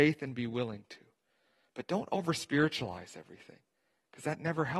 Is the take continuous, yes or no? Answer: yes